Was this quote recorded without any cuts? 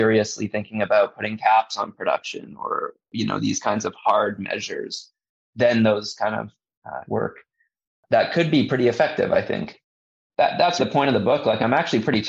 no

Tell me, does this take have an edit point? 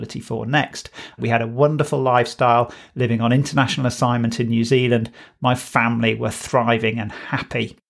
yes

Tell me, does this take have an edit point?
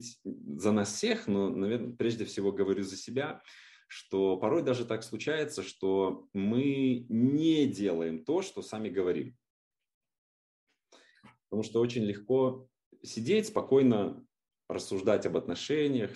no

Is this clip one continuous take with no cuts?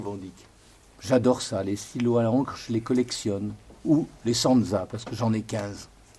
no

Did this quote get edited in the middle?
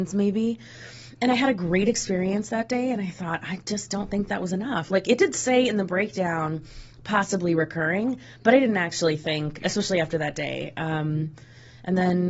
no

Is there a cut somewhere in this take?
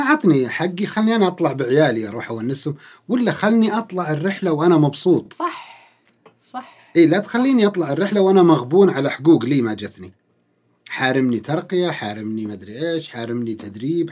no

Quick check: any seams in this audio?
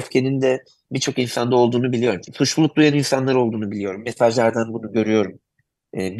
yes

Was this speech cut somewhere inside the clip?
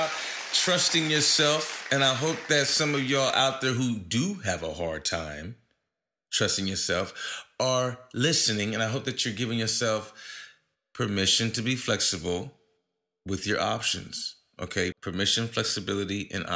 yes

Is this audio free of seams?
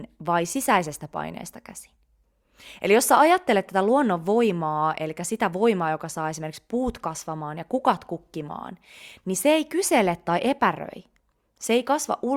yes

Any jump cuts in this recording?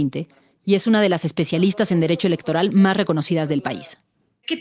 no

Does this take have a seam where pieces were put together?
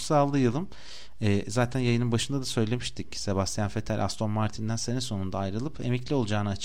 no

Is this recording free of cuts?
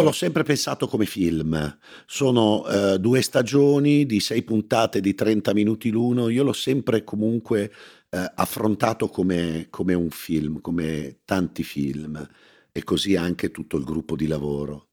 yes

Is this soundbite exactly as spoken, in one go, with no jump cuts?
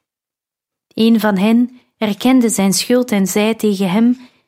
yes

